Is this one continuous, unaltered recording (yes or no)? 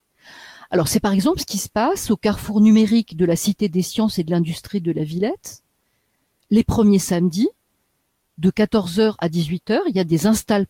yes